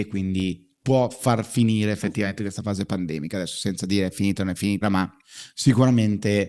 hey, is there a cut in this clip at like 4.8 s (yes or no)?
yes